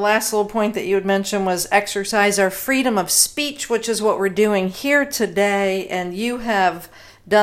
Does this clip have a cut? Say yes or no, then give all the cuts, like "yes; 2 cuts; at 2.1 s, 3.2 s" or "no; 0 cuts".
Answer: no; 0 cuts